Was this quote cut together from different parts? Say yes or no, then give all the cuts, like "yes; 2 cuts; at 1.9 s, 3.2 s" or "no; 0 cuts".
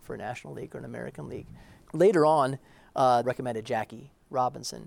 yes; 2 cuts; at 1.9 s, 3.2 s